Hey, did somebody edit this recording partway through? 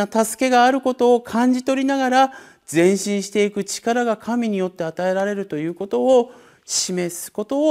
no; 0 cuts

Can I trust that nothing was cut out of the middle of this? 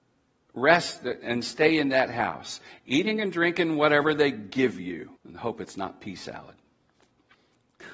no; 1 cut; at 5.2 s

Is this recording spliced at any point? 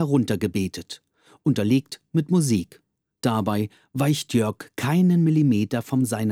no; 0 cuts

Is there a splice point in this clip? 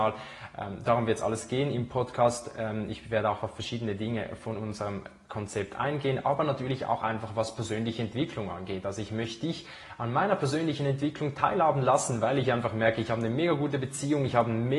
no; 0 cuts

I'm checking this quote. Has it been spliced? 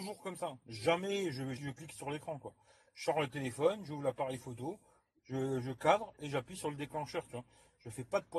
yes; 1 cut; at 1.6 s

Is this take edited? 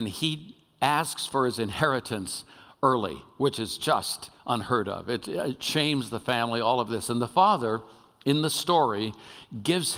no; 0 cuts

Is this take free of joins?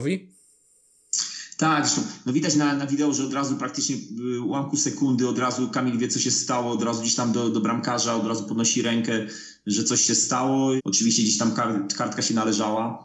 no; 1 cut; at 10.8 s

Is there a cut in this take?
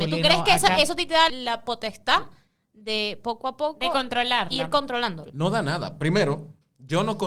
yes; 1 cut; at 1.3 s

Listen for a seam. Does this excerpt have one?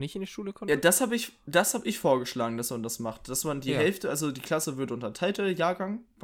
no; 0 cuts

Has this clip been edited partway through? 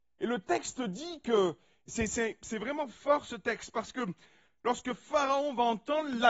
no; 0 cuts

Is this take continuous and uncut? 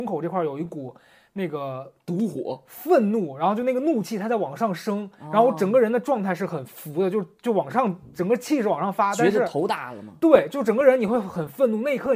yes; 0 cuts

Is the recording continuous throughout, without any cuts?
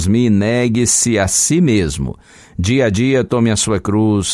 yes; 0 cuts

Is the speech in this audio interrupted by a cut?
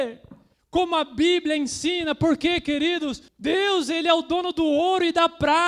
yes; 1 cut; at 3.3 s

